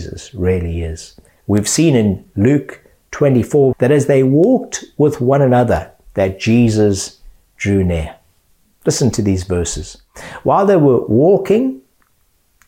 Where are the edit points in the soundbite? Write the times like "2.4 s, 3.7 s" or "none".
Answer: 1.3 s, 3.7 s